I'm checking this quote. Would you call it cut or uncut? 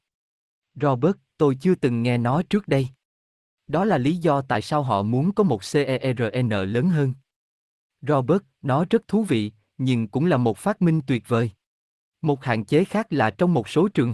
cut